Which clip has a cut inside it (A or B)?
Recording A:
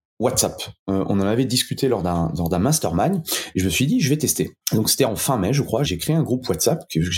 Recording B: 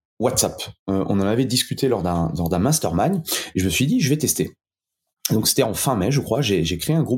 A